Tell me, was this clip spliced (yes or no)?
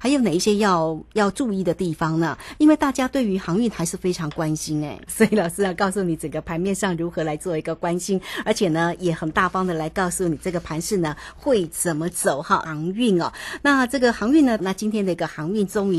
yes